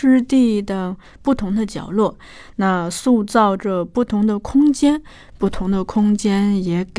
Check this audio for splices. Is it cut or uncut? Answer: uncut